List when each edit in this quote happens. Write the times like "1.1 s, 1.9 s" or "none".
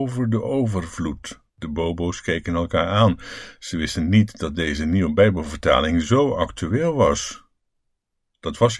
1.5 s